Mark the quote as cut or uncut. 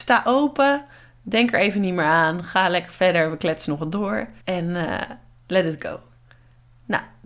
cut